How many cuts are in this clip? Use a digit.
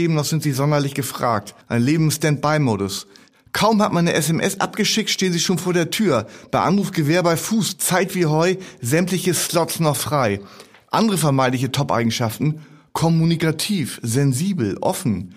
1